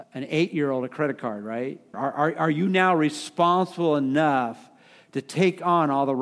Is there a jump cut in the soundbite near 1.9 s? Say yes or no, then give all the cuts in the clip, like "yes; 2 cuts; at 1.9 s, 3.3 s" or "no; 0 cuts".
yes; 1 cut; at 1.9 s